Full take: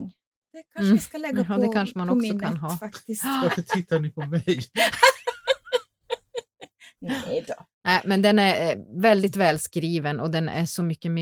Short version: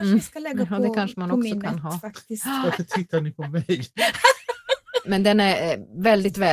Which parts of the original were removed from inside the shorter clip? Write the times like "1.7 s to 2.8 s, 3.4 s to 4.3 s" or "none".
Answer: 5.8 s to 8.0 s

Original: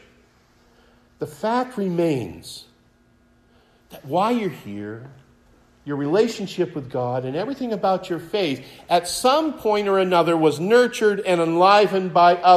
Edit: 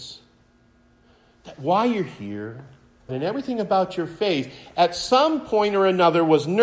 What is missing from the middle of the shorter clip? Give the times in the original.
5.5 s to 7.2 s

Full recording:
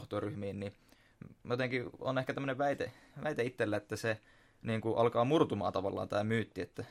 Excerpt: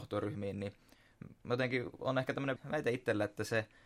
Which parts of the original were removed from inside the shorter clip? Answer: 2.6 s to 3.1 s

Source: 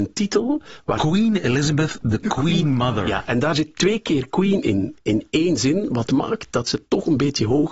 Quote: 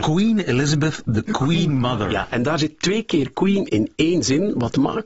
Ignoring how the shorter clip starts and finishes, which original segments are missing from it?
4.6 s to 5.0 s

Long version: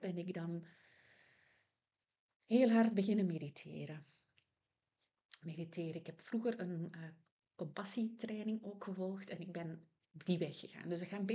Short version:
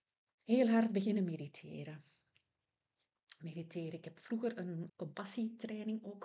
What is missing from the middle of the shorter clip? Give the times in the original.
6.9 s to 7.5 s

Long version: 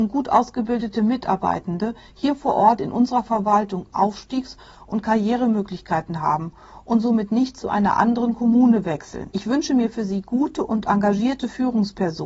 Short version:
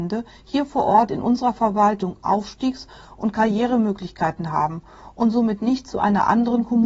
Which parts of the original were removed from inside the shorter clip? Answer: none

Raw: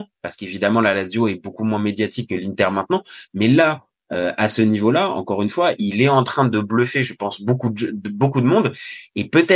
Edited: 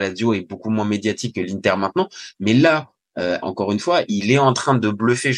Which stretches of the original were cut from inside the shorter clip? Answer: 4.4 s to 5.1 s

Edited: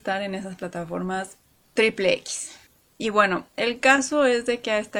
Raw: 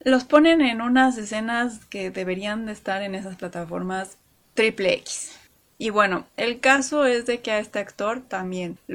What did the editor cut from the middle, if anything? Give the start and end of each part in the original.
none

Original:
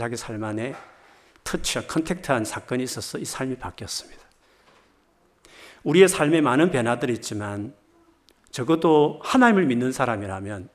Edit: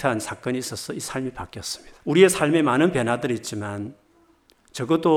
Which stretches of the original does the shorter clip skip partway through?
4.2 s to 5.8 s

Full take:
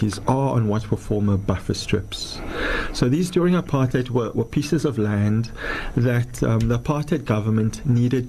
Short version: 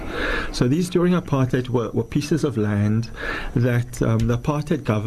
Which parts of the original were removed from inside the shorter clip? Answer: none

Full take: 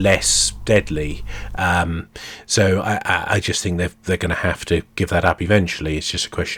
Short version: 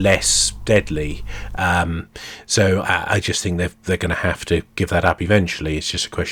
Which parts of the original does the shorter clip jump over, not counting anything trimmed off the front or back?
2.8 s to 3.0 s

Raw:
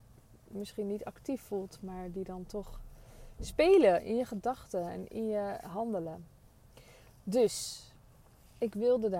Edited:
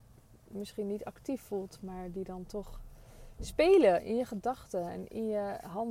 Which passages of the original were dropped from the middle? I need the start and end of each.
none

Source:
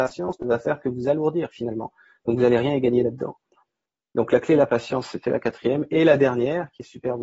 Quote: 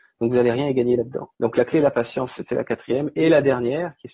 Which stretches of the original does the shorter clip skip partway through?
3.4 s to 4.1 s

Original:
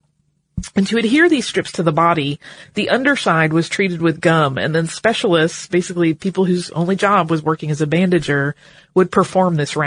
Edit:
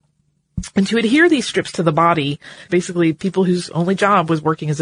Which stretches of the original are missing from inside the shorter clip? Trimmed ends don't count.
2.7 s to 5.7 s

